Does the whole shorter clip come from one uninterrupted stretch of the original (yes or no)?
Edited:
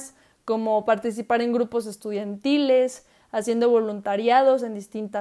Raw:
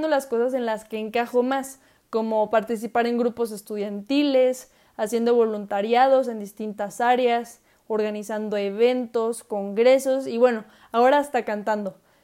yes